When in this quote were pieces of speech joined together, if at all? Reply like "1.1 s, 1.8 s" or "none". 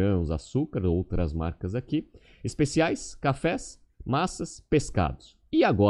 none

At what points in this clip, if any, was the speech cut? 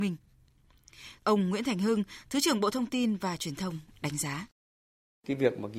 1.2 s

